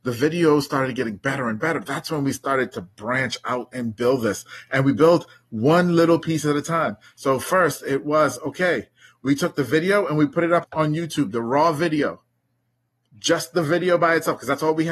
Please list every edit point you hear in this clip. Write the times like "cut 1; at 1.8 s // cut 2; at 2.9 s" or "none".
cut 1; at 10.6 s